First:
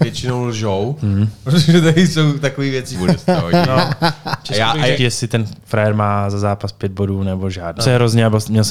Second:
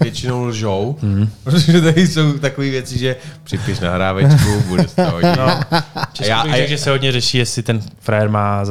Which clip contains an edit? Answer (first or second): first